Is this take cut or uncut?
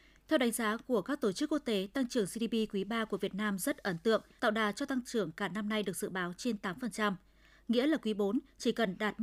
cut